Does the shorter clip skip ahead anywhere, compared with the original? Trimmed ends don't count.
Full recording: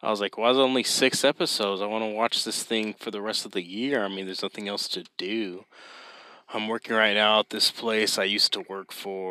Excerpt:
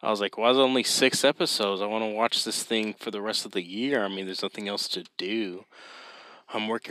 no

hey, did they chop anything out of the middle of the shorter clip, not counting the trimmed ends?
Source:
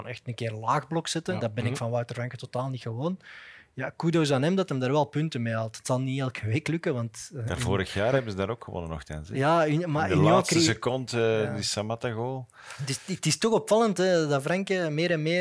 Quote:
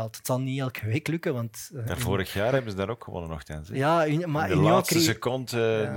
no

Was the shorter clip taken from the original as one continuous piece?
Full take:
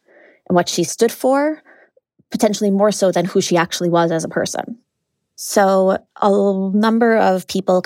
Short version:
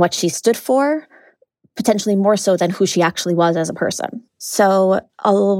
no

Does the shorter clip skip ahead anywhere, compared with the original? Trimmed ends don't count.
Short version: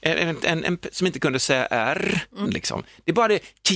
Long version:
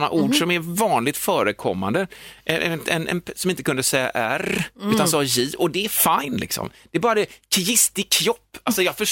yes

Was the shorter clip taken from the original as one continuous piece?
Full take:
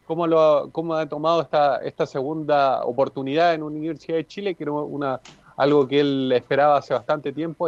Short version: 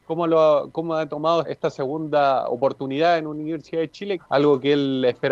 no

